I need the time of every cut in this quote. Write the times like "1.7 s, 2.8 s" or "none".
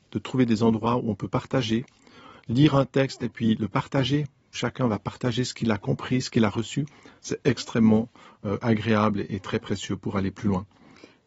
none